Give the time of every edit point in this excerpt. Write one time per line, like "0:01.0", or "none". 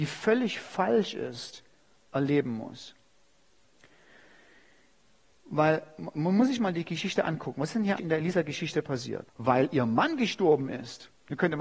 0:08.0
0:09.3